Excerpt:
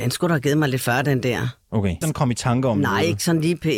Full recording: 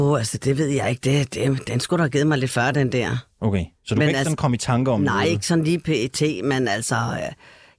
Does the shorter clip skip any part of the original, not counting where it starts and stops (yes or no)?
yes